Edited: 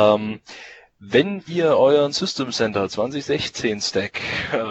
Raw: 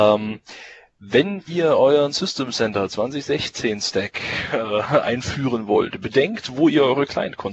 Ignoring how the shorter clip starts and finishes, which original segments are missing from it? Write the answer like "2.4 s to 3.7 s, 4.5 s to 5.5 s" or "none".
none